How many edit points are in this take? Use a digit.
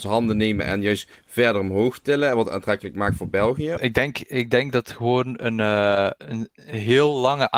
2